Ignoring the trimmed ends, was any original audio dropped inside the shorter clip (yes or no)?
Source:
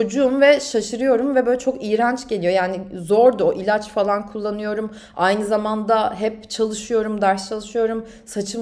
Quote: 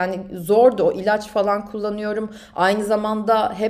no